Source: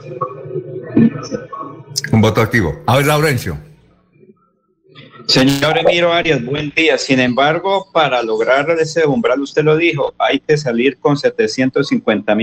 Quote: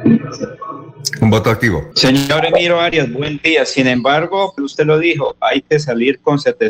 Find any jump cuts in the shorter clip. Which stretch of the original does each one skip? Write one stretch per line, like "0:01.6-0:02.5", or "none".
0:02.8-0:05.2
0:07.9-0:09.4

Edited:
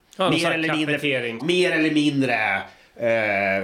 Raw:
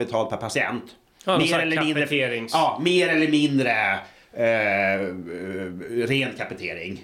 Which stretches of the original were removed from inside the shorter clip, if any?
0:02.5-0:02.8

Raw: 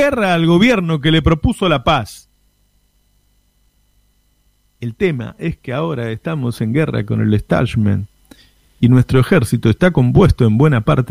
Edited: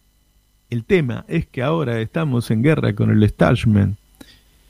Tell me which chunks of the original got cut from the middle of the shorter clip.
none

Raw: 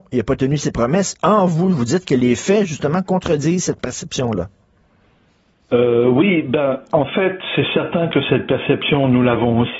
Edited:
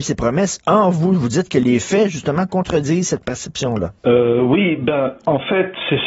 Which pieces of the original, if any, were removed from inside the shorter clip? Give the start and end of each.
0:04.5-0:05.6

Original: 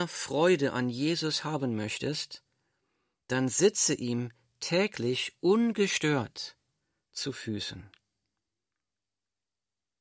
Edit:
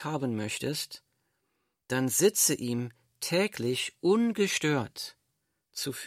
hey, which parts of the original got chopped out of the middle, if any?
none

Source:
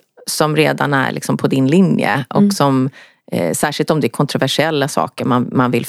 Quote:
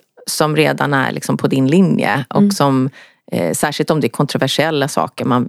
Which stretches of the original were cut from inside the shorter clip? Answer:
none

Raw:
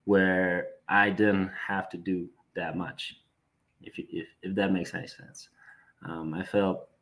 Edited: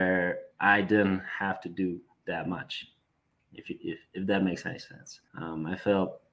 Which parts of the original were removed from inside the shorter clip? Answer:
0:05.6-0:06.0

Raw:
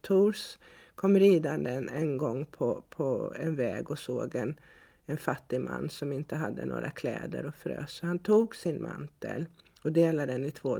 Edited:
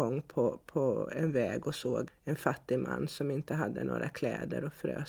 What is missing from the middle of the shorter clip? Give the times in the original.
0:04.3-0:04.9

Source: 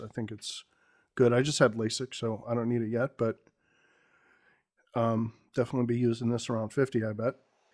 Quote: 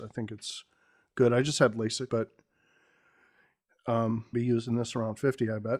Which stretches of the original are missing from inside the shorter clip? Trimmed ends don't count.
0:02.1-0:03.2
0:05.4-0:05.9

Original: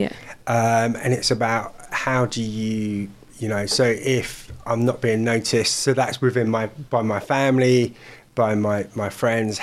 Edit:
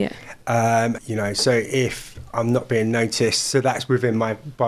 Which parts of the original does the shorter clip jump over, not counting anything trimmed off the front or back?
0:01.0-0:03.3

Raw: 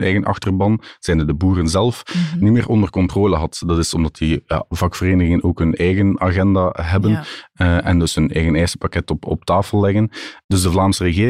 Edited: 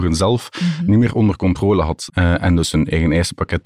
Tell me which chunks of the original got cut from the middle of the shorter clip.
0:03.6-0:07.5

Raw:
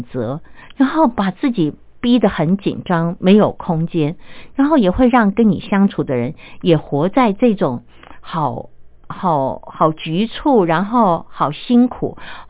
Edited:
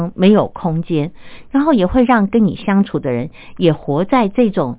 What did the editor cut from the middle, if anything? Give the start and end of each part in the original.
none

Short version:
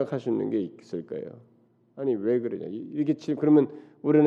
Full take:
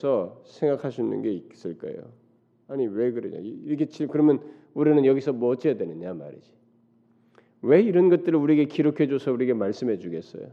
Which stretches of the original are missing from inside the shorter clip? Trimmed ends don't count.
none

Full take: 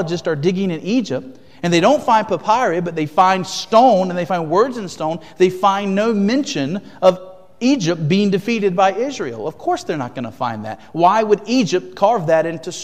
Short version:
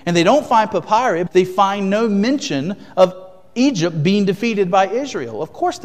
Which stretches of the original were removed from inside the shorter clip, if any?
0:02.8-0:05.3

